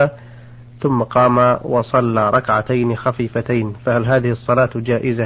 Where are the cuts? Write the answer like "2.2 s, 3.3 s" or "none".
none